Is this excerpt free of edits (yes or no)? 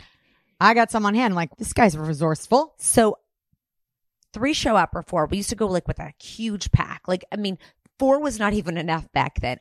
no